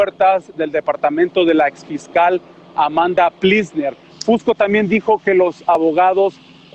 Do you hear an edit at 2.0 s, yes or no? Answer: no